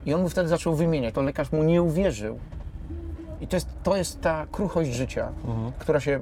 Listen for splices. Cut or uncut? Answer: cut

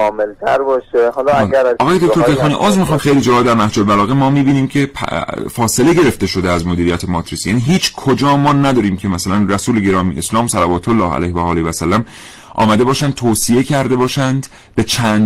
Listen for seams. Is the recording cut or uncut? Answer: cut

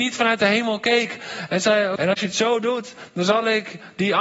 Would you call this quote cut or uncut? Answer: cut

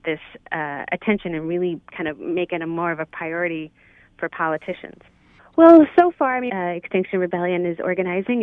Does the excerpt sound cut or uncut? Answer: cut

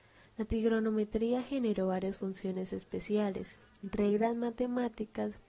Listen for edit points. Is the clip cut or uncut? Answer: uncut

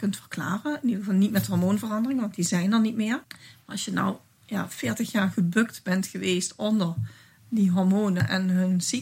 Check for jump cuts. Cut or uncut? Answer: cut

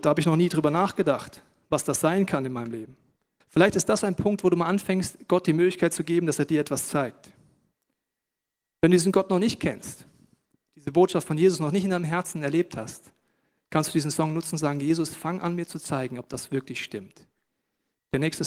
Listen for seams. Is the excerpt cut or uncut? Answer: cut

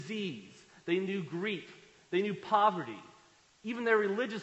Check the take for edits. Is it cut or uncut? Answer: uncut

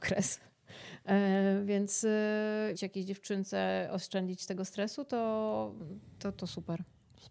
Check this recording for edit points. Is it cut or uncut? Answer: cut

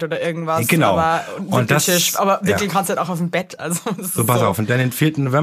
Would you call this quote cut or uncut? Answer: uncut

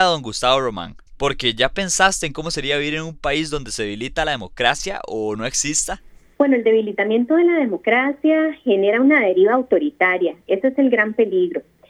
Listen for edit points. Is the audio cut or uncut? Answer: cut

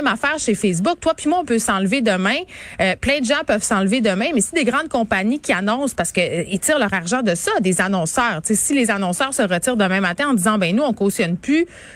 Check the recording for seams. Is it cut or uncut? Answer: uncut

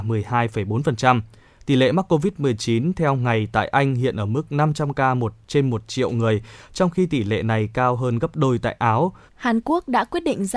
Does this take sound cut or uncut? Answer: cut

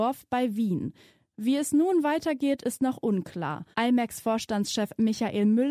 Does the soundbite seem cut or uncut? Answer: cut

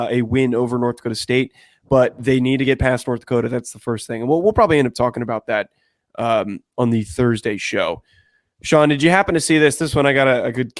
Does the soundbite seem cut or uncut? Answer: uncut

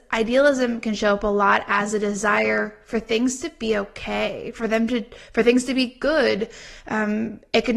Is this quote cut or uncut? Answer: uncut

